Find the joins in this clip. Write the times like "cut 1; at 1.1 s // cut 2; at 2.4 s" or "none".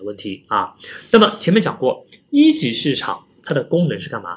none